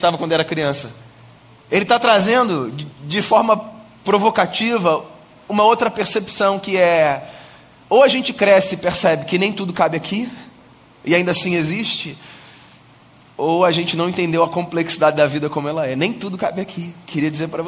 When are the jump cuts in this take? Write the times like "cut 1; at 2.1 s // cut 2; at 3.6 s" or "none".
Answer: none

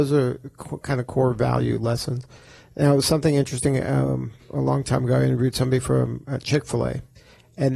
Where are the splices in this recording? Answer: none

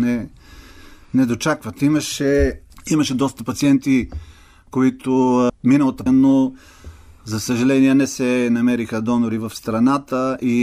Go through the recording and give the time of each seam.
cut 1; at 6.1 s

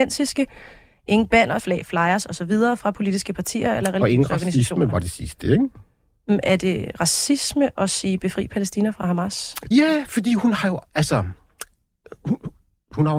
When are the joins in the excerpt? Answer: cut 1; at 1.6 s // cut 2; at 9.7 s

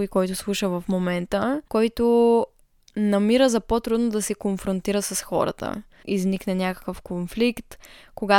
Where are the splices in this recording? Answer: cut 1; at 1.7 s // cut 2; at 6.0 s

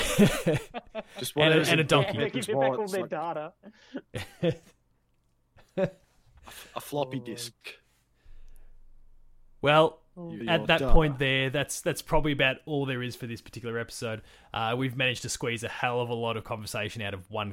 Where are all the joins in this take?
cut 1; at 10.4 s

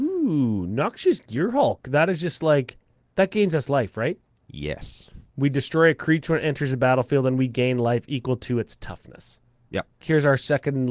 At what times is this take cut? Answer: cut 1; at 10.0 s

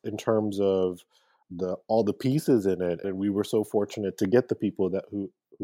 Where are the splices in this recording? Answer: cut 1; at 1.4 s // cut 2; at 3.0 s

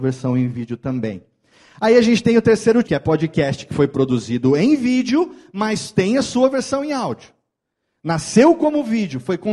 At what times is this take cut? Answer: cut 1; at 2.8 s

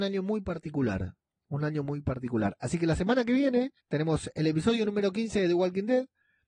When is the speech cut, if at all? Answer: cut 1; at 3.8 s

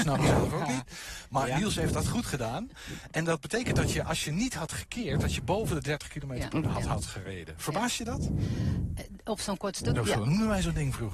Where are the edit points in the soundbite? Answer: cut 1; at 6.6 s // cut 2; at 10.0 s

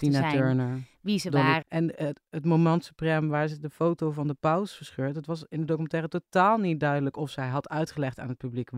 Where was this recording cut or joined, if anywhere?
cut 1; at 1.6 s

